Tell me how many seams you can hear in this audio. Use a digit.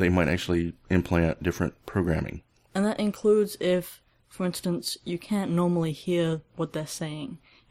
0